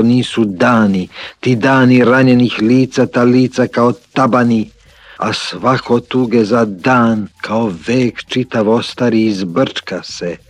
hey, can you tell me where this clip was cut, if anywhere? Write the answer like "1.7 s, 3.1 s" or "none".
5.2 s, 7.3 s

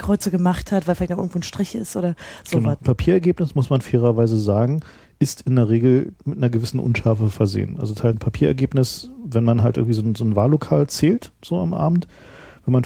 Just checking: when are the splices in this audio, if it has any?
2.8 s, 8.1 s

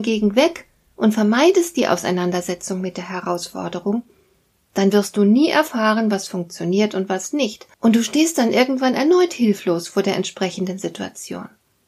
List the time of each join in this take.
7.7 s

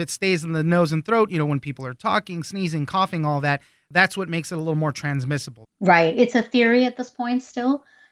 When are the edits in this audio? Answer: 5.6 s

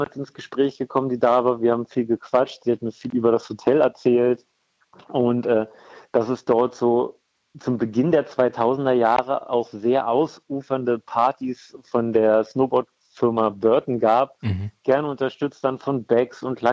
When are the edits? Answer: none

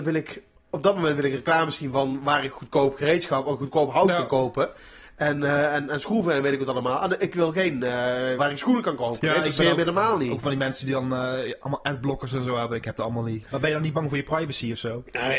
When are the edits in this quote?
8.4 s, 13.4 s

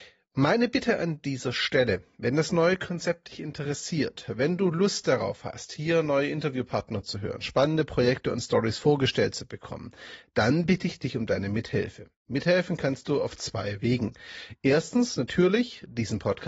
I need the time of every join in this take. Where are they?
none

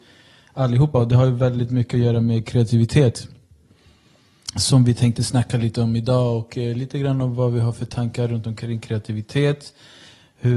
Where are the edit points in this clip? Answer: none

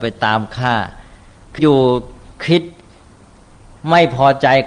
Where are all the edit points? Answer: 1.6 s

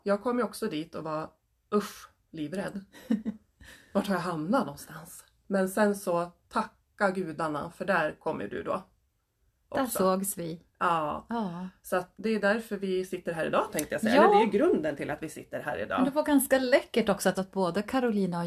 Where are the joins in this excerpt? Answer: 12.1 s, 17.3 s

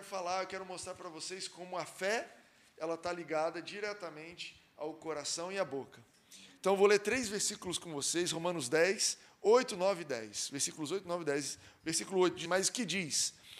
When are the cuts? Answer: 12.5 s

